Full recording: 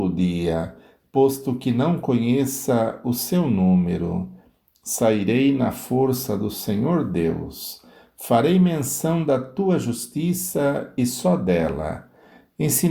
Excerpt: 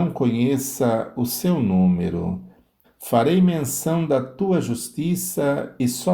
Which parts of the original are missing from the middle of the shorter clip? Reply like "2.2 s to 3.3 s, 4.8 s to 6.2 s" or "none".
4.7 s to 8.0 s